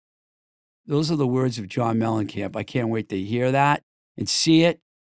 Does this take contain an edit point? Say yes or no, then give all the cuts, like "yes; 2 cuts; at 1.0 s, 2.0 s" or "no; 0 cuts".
no; 0 cuts